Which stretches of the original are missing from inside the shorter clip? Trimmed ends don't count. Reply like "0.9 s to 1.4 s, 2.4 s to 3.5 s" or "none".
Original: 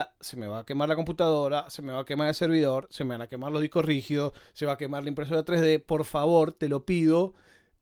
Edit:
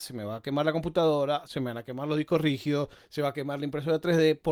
1.7 s to 2.9 s